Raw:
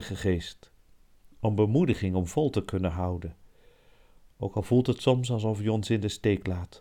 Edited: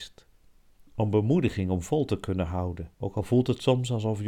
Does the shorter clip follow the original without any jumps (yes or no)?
no